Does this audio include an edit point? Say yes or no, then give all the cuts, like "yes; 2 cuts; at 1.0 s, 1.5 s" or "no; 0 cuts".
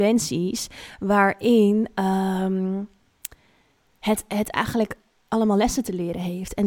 no; 0 cuts